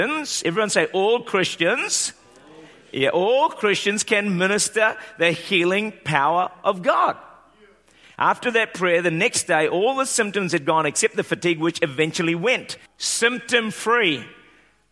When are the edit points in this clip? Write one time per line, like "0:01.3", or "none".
0:08.0
0:12.9